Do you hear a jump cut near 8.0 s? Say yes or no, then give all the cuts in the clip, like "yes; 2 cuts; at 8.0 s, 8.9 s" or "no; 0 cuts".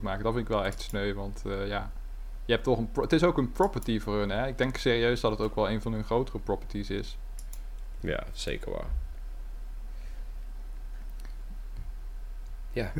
yes; 1 cut; at 8.0 s